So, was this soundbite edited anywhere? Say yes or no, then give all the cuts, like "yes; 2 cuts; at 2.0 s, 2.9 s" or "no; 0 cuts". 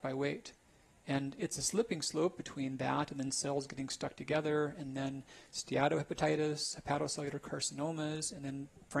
no; 0 cuts